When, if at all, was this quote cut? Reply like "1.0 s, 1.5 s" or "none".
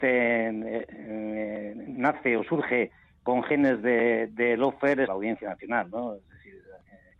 5.1 s